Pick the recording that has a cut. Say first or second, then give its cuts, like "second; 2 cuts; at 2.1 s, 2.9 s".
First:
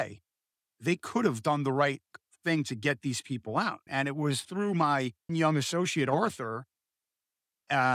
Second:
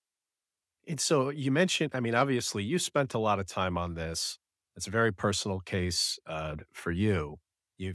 first; 2 cuts; at 3.9 s, 5.3 s